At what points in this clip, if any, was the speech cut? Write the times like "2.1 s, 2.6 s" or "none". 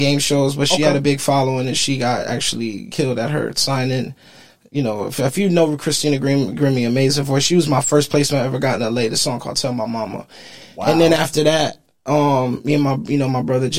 none